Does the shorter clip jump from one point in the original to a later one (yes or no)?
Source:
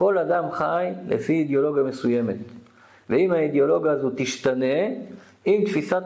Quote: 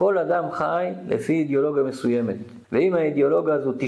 yes